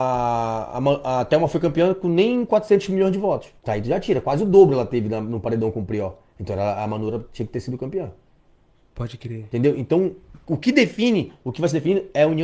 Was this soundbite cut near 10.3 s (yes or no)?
no